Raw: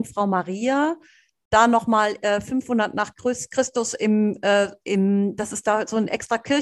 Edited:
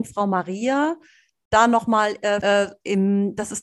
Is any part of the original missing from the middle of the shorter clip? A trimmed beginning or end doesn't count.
yes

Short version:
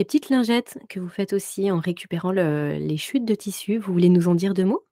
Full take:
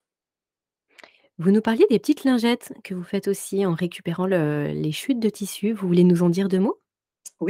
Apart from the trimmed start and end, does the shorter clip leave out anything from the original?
no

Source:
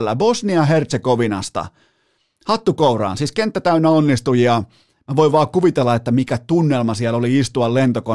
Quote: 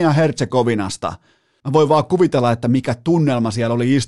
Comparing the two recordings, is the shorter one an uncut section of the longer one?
no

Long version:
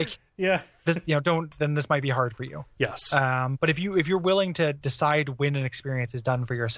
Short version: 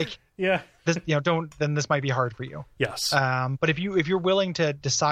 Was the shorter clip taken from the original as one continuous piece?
yes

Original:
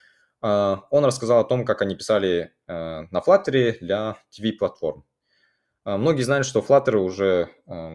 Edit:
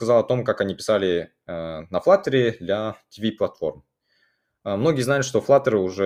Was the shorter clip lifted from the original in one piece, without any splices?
yes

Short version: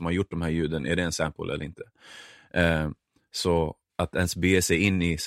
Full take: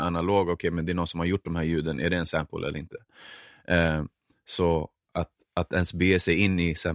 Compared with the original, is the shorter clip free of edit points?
no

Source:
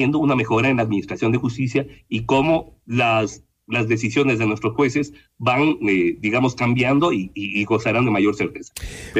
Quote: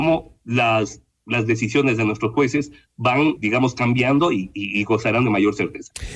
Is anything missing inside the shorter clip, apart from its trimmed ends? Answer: yes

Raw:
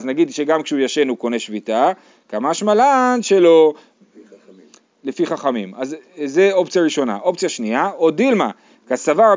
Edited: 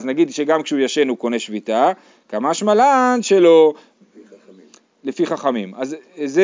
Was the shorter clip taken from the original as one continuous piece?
yes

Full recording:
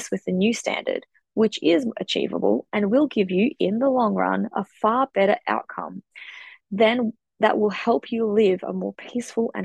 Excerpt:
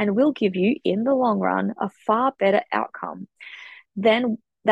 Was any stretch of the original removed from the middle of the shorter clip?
no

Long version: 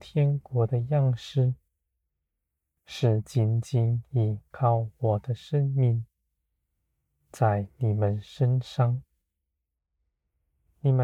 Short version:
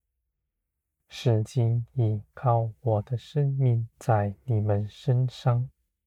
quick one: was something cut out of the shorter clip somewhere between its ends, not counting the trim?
yes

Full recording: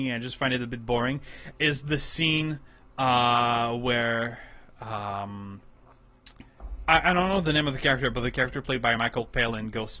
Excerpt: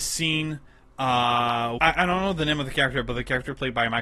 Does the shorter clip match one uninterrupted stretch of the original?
no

